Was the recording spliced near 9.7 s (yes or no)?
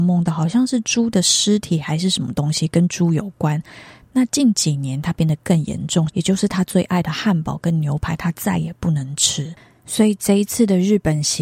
no